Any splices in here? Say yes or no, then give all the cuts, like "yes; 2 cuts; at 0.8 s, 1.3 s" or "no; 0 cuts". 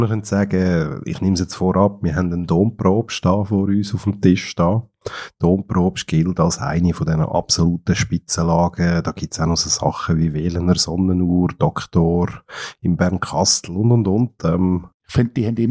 no; 0 cuts